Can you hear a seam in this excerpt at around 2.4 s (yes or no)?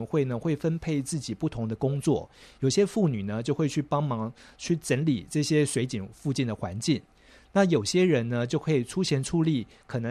no